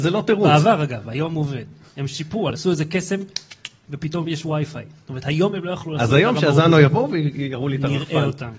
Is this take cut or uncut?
cut